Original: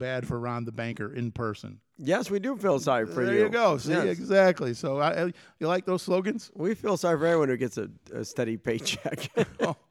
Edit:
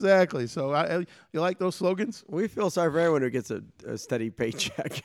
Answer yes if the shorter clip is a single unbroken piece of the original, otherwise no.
yes